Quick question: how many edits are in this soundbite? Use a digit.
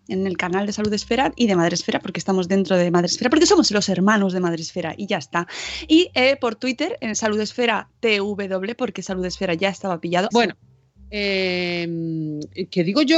2